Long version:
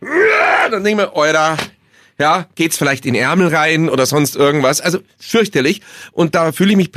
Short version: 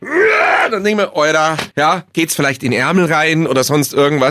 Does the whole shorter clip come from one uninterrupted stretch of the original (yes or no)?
no